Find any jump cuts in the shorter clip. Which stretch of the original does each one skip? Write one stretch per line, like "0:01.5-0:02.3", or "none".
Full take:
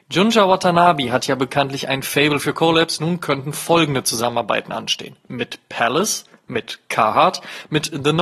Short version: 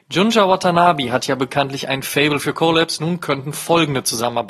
none